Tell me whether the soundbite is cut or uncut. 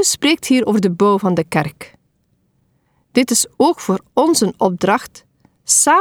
uncut